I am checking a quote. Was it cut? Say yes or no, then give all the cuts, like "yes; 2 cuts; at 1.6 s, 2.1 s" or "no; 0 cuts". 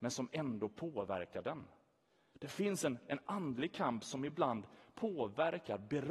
no; 0 cuts